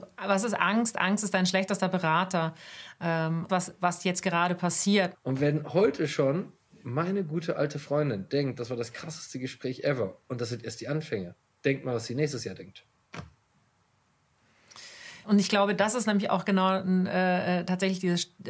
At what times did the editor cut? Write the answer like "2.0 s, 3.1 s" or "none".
3.5 s, 5.1 s, 15.2 s